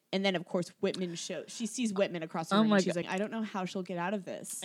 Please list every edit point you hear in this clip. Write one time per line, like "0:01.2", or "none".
0:03.0